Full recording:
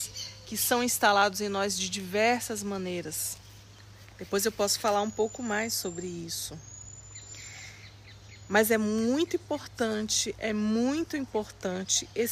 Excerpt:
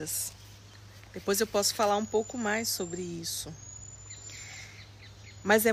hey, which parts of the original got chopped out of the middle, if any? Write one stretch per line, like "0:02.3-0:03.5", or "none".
none